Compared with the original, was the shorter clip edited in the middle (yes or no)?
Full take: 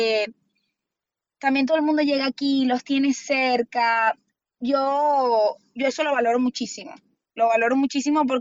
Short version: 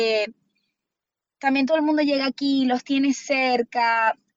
no